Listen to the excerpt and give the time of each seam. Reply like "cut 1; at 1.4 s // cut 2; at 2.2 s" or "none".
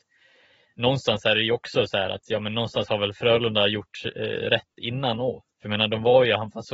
cut 1; at 5.5 s